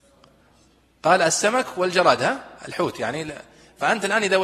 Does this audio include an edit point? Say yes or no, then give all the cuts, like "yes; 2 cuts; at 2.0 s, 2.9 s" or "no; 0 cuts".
yes; 1 cut; at 2.6 s